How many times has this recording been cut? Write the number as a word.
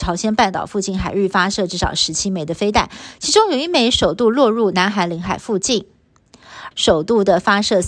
one